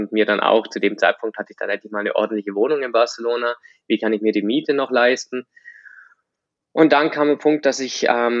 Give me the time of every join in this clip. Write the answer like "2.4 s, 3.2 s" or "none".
none